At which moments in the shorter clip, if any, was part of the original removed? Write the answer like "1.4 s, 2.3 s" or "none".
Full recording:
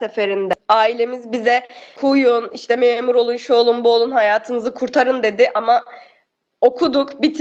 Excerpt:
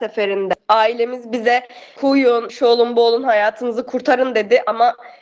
2.5 s